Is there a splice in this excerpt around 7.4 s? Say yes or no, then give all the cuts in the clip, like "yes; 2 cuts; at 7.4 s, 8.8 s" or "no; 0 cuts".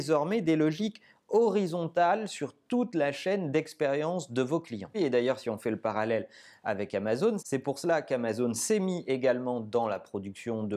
yes; 2 cuts; at 4.9 s, 7.4 s